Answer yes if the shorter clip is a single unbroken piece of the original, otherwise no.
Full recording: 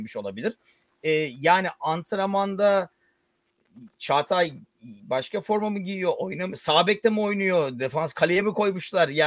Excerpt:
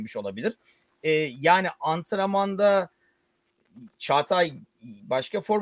yes